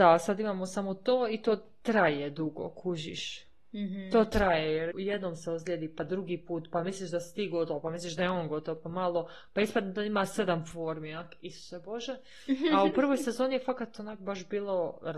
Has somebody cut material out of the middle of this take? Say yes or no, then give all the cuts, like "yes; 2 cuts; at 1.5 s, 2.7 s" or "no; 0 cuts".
yes; 1 cut; at 4.9 s